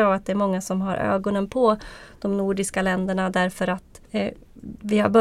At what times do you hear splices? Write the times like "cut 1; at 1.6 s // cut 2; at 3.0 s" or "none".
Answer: cut 1; at 4.0 s